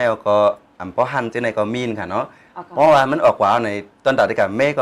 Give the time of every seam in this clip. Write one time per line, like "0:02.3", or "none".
0:01.3